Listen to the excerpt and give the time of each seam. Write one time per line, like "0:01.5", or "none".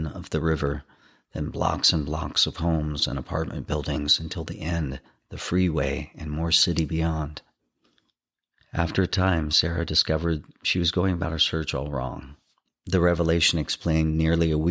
0:12.7